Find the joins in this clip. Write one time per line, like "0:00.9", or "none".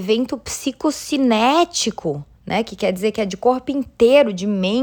0:02.3